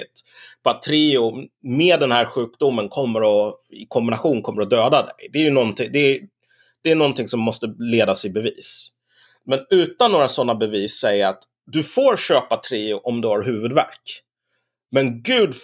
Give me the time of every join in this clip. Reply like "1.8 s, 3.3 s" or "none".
none